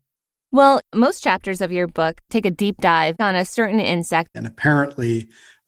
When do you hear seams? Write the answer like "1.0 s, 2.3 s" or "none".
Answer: 4.3 s